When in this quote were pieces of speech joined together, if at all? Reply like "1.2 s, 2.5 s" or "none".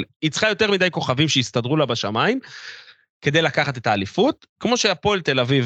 none